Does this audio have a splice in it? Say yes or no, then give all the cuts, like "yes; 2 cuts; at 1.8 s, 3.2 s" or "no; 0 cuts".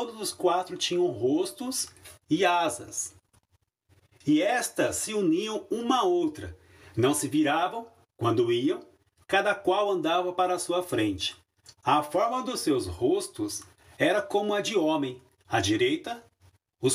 no; 0 cuts